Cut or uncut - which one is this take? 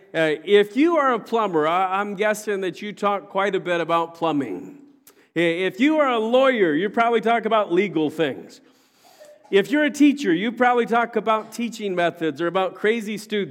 uncut